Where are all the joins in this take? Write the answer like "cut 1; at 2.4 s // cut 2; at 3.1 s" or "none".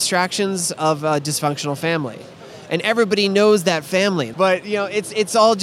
cut 1; at 4.3 s